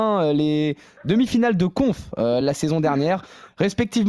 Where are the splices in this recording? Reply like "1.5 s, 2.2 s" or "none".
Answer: none